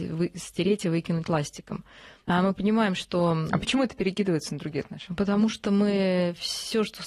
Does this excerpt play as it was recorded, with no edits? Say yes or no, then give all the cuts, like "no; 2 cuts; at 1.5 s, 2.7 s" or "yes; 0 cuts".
no; 1 cut; at 2.2 s